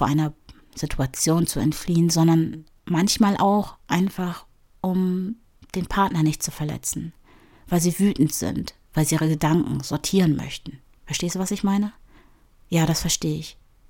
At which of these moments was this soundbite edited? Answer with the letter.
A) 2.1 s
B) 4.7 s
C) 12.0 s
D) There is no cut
D